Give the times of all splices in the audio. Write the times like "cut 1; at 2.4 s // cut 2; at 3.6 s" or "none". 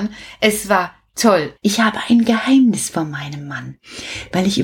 cut 1; at 1.6 s